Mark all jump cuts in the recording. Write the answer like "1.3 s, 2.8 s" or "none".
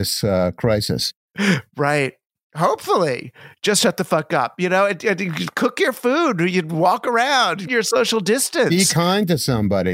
7.7 s